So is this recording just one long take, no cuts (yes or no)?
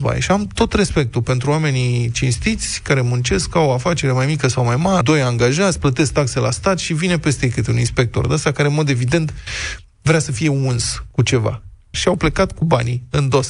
no